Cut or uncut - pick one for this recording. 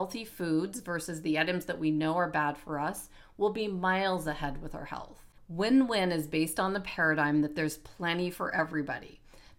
cut